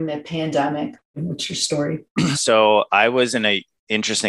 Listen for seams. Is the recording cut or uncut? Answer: cut